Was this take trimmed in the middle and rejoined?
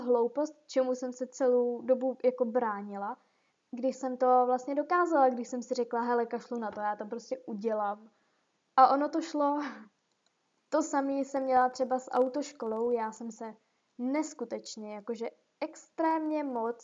no; 0 cuts

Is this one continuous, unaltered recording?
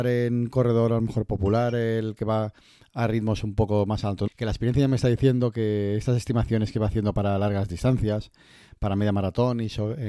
no; 1 cut; at 4.3 s

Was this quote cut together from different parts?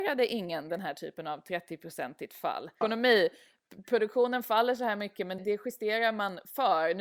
yes; 2 cuts; at 2.8 s, 5.4 s

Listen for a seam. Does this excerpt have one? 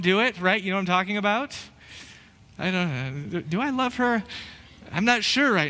yes; 1 cut; at 2.6 s

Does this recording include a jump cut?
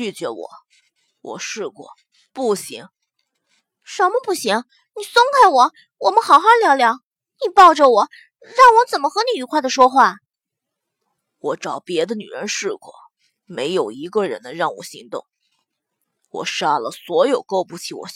no; 0 cuts

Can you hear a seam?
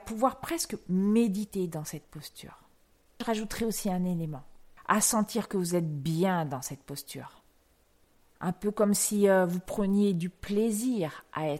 no; 0 cuts

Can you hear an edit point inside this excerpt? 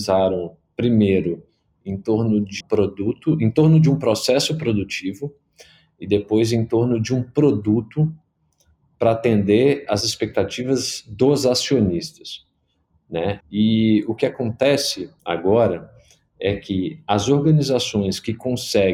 yes; 3 cuts; at 2.6 s, 13.4 s, 15.2 s

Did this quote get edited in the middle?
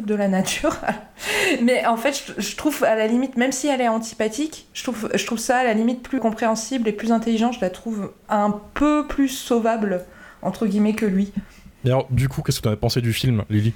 yes; 1 cut; at 6.2 s

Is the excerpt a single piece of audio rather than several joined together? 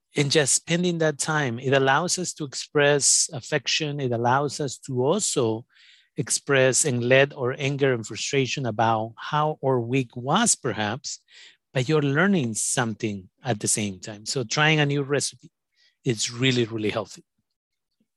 yes; 0 cuts

